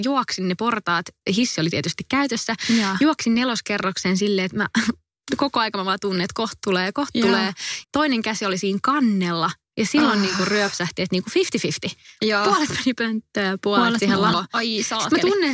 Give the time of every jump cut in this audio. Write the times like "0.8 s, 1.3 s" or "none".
7.8 s, 14.3 s